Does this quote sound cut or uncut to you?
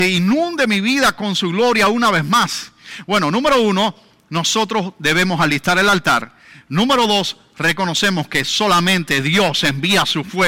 uncut